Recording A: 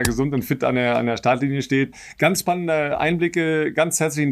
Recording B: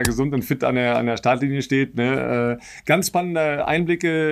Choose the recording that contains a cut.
A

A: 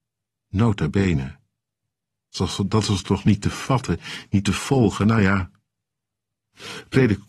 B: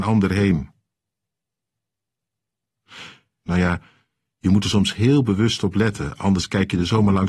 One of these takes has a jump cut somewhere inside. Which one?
B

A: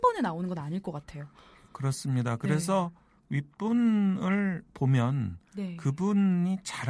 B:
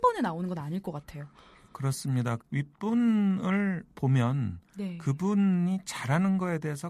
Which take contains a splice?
B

